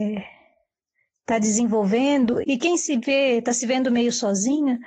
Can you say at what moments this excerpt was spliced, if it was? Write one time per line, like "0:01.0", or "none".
0:02.4